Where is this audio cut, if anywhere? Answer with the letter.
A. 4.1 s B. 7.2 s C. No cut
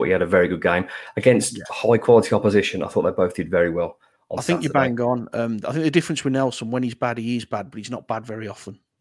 C